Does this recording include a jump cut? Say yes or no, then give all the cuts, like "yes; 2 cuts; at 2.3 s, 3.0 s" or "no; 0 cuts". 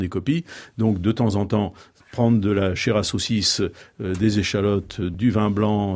no; 0 cuts